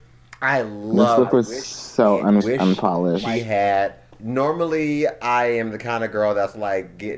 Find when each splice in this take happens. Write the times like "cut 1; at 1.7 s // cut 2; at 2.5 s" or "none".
cut 1; at 2.4 s